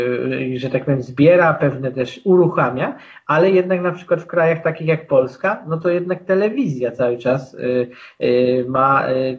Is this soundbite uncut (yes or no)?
yes